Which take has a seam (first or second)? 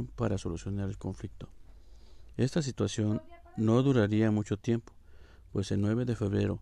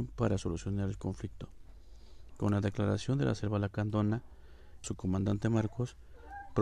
second